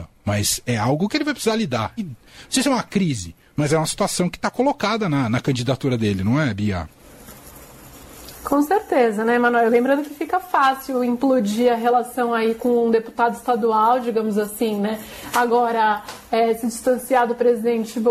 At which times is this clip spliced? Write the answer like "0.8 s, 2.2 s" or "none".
2.0 s